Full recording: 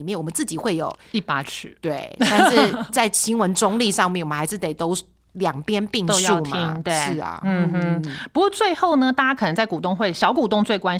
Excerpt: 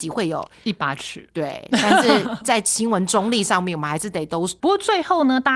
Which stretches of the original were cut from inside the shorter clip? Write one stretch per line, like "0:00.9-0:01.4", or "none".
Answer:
0:05.1-0:08.3